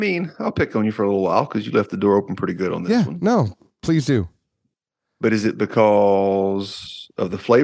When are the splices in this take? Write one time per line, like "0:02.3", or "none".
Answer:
none